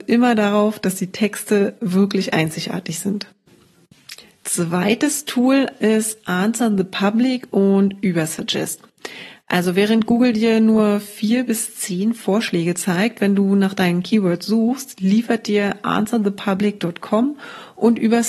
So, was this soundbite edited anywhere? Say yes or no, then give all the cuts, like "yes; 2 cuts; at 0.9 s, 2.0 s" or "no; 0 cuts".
no; 0 cuts